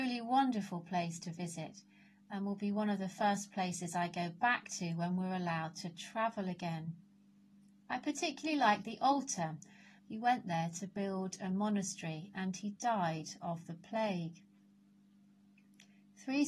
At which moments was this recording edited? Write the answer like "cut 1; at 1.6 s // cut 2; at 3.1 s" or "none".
cut 1; at 10.0 s